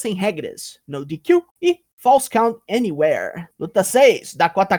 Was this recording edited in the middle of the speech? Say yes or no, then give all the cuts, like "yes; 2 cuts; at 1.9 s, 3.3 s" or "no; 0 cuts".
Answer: yes; 2 cuts; at 1.5 s, 3.5 s